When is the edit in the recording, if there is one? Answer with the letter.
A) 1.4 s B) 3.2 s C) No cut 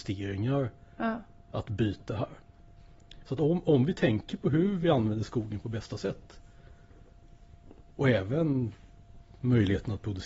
B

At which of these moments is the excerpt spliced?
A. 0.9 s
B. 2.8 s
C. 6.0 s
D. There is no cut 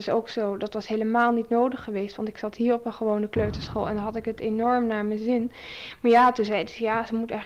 D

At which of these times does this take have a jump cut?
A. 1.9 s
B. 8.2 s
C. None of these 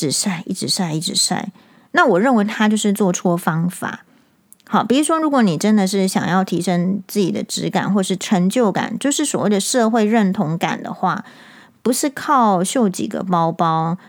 B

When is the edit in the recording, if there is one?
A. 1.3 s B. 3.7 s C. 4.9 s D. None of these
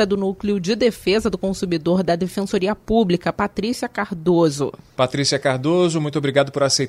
D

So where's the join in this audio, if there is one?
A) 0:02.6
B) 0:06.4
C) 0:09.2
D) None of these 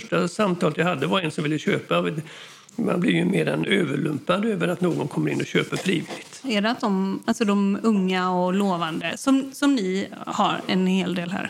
B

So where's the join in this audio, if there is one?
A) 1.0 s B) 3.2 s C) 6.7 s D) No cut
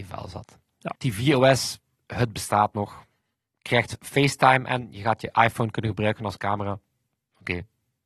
A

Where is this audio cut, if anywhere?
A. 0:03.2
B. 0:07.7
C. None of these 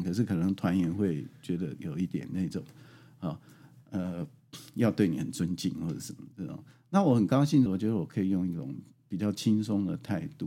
B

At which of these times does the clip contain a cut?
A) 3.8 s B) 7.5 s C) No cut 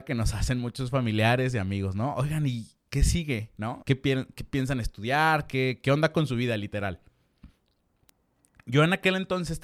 A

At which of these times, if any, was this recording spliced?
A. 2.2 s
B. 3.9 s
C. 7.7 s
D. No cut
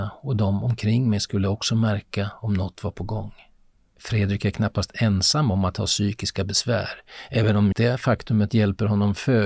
C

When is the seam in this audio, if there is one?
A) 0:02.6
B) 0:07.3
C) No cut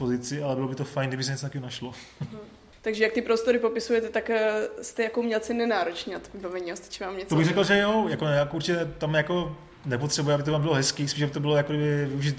C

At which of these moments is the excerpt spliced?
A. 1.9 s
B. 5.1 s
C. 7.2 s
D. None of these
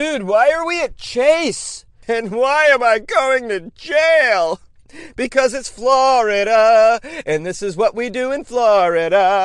D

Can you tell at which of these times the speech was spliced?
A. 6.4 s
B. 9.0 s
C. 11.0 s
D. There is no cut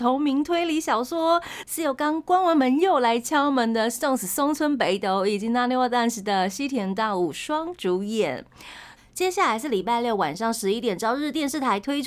B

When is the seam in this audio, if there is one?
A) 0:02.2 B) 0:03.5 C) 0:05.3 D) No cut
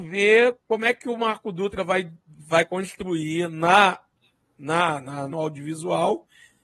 C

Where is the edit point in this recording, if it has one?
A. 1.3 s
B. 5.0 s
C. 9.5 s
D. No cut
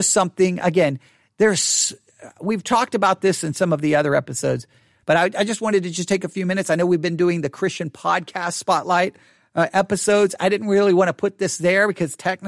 B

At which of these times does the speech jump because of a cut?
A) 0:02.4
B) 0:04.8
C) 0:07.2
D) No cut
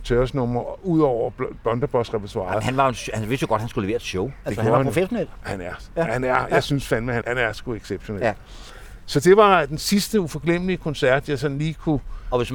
C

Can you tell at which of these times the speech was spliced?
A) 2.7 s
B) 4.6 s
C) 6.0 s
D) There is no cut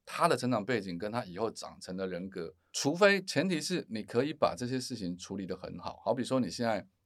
A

